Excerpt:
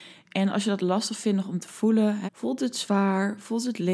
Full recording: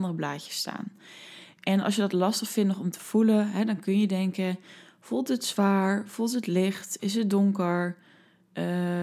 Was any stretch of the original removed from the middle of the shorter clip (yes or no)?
yes